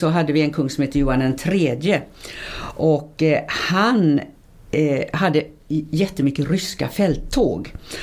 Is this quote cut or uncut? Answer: uncut